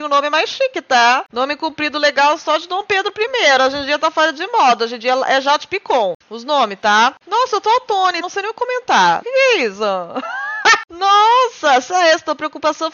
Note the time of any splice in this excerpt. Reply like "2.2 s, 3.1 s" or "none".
8.2 s, 9.2 s